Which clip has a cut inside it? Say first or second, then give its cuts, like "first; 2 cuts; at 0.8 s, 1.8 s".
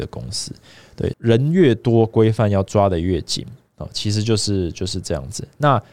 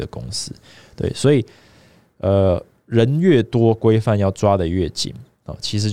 first; 1 cut; at 1.1 s